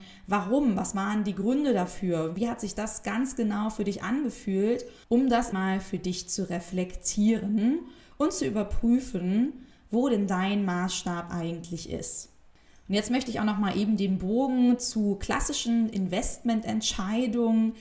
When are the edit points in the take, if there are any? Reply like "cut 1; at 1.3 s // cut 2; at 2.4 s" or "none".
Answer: cut 1; at 5.5 s